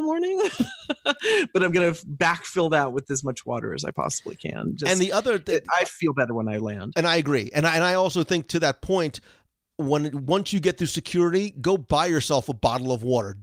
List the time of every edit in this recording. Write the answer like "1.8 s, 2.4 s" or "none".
none